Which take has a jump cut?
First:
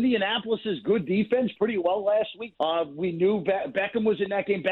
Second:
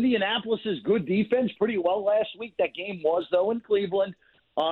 first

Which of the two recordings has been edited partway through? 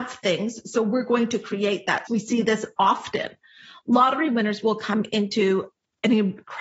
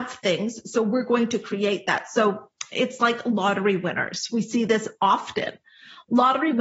first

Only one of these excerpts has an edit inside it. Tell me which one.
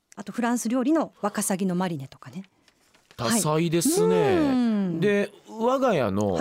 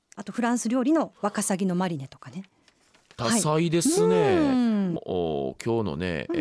second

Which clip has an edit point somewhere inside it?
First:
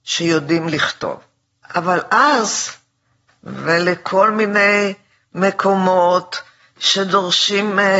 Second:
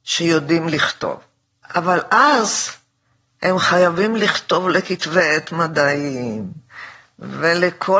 first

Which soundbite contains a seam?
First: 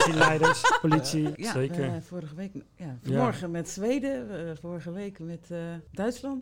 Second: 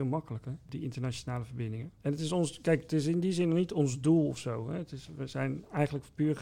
first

